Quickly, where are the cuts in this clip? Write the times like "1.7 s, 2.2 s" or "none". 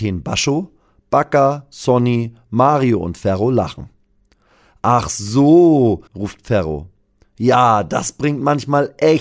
6.1 s